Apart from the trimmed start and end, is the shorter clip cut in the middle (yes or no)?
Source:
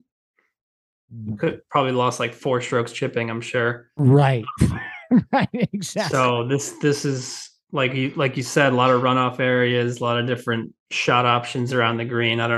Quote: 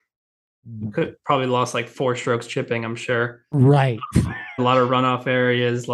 yes